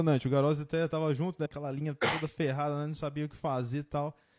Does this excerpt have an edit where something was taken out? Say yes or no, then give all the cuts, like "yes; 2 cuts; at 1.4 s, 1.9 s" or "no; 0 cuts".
yes; 1 cut; at 1.5 s